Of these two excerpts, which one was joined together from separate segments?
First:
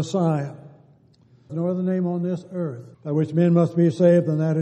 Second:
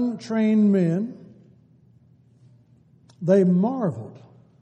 first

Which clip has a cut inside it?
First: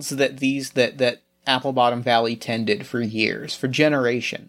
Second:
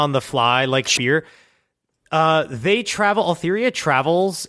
second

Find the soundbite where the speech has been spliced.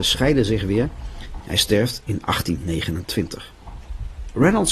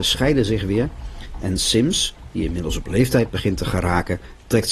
first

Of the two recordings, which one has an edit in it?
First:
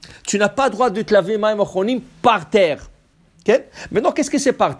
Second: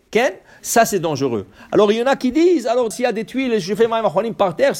second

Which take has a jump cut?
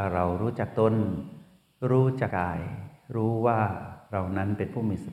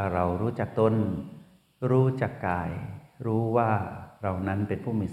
first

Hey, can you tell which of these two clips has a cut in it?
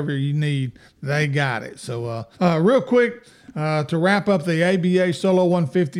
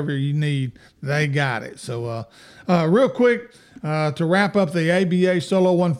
first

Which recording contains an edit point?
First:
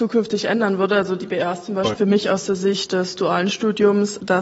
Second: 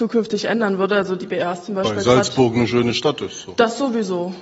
first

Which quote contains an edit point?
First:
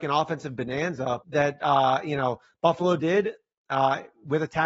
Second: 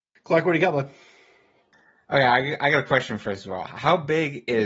first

